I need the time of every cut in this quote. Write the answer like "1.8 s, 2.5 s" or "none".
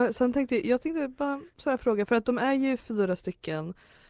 none